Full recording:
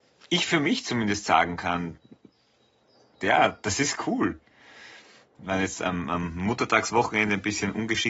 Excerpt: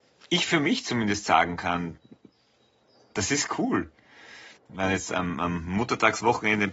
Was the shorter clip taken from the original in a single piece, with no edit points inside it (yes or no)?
no